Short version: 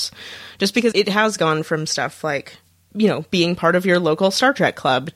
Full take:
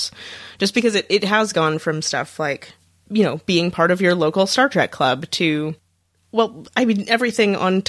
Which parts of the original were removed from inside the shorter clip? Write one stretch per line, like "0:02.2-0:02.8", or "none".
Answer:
0:00.9-0:01.1